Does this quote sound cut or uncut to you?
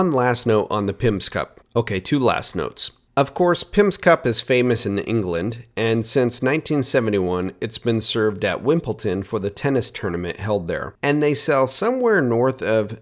uncut